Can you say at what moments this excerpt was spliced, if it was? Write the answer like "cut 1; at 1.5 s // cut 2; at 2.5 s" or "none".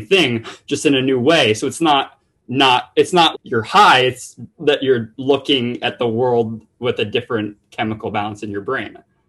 cut 1; at 3.3 s